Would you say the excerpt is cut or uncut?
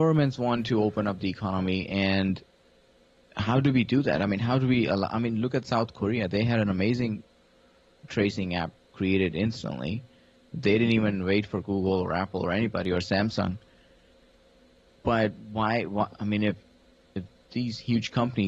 uncut